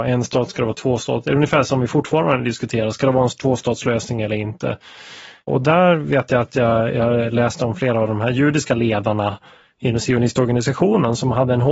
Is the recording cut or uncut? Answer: uncut